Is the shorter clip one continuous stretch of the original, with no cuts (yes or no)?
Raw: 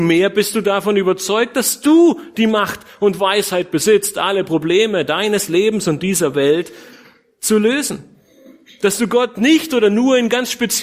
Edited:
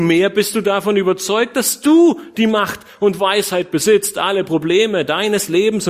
yes